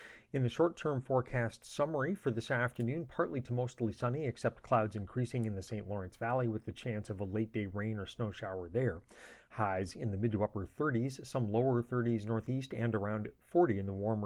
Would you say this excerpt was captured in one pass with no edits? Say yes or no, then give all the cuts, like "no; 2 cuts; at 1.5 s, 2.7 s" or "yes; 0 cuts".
yes; 0 cuts